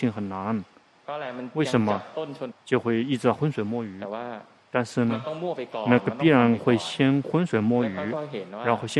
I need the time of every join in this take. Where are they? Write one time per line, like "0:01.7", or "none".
0:02.5